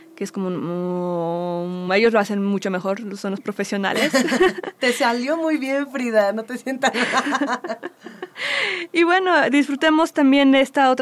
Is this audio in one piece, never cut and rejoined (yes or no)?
yes